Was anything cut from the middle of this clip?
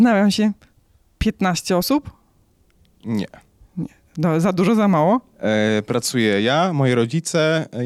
no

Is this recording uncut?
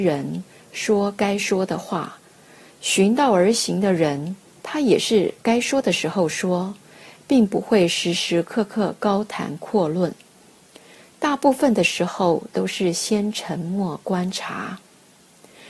yes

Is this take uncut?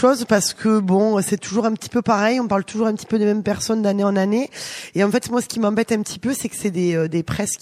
yes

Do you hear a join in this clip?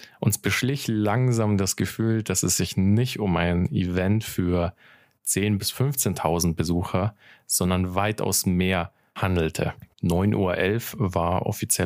yes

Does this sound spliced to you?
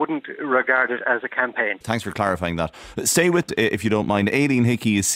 yes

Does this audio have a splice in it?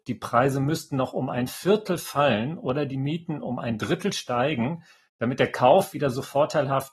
no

